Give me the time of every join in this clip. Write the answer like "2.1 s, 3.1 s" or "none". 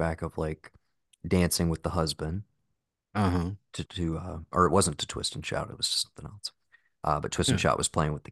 3.9 s